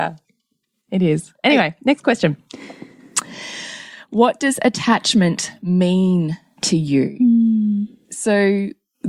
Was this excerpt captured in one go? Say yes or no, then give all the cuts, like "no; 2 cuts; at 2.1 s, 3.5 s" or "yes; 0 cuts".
yes; 0 cuts